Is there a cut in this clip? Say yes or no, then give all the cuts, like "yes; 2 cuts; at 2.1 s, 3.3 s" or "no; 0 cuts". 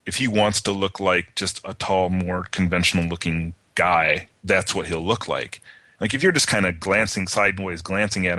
no; 0 cuts